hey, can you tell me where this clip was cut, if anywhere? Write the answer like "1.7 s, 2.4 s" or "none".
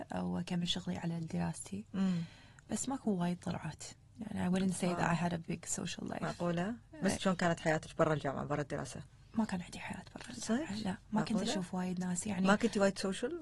7.2 s, 11.0 s